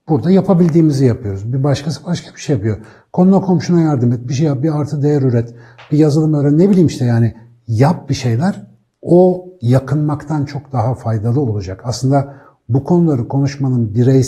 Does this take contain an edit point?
no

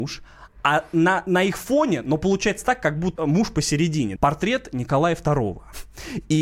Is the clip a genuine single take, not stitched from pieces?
no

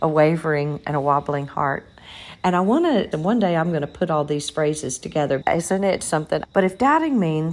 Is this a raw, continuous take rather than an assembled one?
no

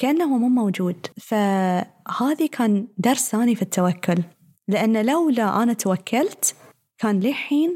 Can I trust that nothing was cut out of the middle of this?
no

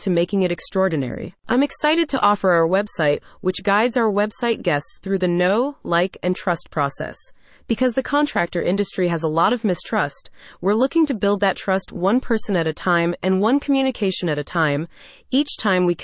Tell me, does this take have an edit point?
no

